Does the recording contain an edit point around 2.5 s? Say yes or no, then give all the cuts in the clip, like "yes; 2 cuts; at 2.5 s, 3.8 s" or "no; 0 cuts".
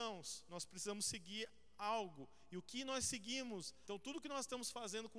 no; 1 cut; at 3.8 s